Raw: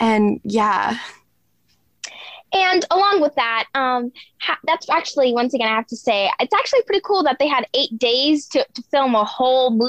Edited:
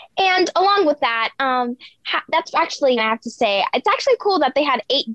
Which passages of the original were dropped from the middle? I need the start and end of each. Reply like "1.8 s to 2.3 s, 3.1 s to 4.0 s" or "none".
5.3 s to 5.6 s, 6.8 s to 7.0 s